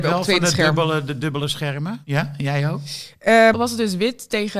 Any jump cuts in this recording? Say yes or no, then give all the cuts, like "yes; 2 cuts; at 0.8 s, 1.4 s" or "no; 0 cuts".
yes; 2 cuts; at 2.0 s, 3.5 s